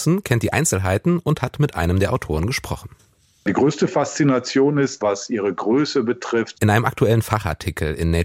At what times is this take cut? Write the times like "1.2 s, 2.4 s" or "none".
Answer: 5.0 s, 6.5 s